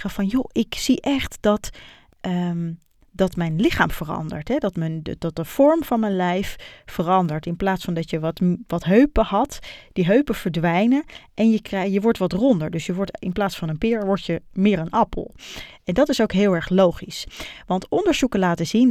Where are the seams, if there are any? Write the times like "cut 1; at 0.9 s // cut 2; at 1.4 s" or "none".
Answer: none